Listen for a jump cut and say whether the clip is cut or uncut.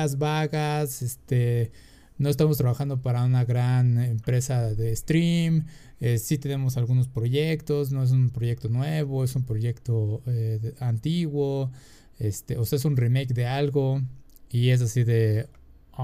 uncut